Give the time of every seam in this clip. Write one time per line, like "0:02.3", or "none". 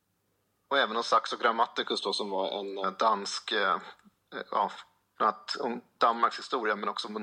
0:05.1